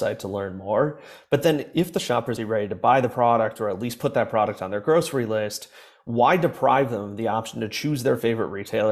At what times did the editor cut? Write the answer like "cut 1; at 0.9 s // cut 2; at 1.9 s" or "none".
cut 1; at 2.4 s